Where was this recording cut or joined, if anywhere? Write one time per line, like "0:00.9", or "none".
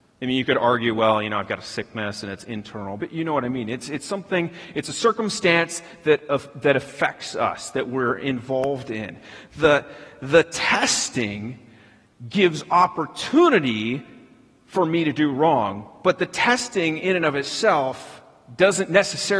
0:03.0